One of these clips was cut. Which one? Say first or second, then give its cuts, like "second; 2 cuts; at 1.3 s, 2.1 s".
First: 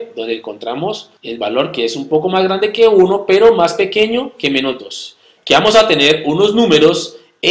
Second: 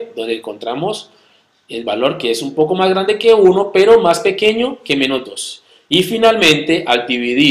first; 2 cuts; at 1.2 s, 5.4 s